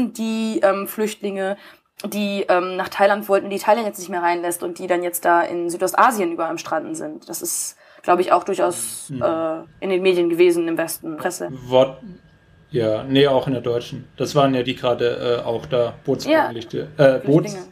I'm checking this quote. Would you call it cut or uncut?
cut